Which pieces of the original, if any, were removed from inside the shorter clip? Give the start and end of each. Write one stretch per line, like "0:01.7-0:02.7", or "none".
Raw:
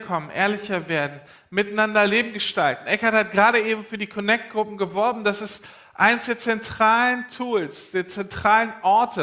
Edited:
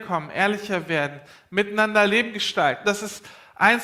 0:02.8-0:05.2

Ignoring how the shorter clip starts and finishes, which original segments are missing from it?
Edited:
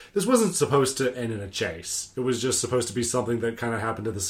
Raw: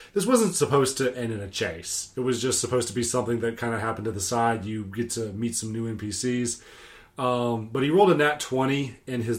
none

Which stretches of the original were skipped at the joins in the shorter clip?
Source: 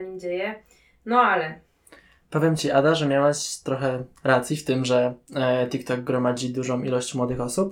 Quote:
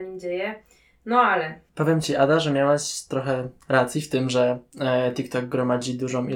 0:01.7-0:02.2

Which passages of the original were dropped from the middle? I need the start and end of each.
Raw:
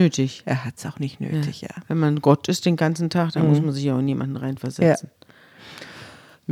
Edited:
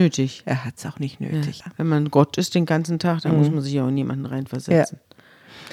0:01.6-0:01.7

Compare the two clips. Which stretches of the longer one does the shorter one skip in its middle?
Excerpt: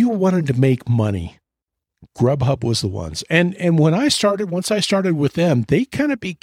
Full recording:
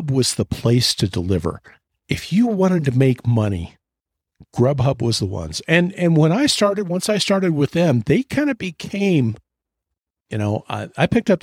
none

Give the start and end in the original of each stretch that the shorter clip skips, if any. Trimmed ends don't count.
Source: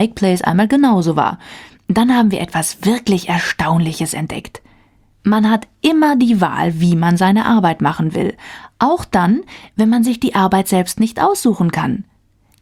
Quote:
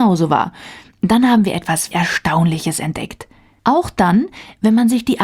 0:02.8-0:03.3
0:04.9-0:08.7

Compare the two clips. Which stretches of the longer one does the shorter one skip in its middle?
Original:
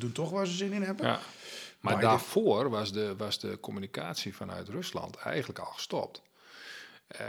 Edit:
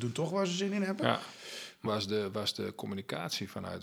0:01.9-0:02.7

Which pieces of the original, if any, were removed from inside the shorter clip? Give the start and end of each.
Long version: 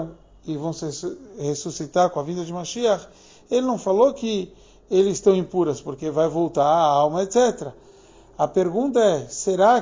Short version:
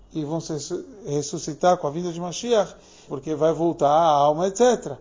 0:03.4-0:05.8

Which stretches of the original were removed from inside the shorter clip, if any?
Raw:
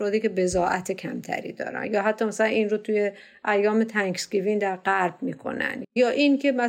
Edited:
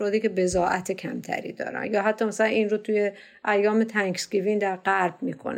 none

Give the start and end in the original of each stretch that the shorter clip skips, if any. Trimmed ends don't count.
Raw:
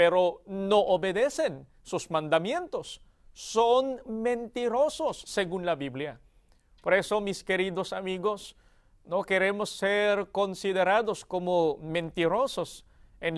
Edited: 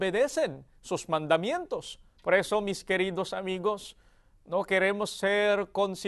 0:03.2-0:06.8

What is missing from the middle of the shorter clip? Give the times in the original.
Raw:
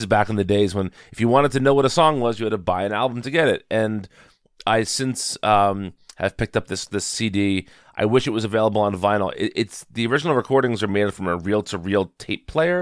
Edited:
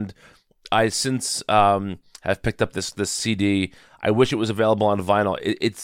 none

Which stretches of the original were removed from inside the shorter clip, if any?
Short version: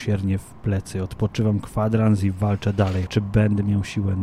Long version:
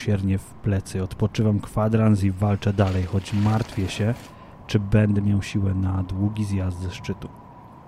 0:03.1-0:04.6

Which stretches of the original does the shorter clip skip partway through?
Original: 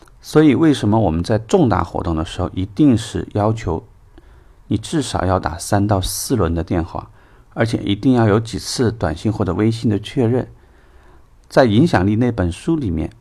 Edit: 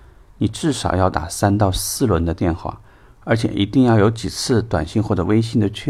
none

